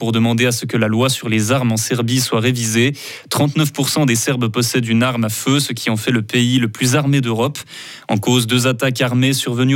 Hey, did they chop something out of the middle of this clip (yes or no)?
no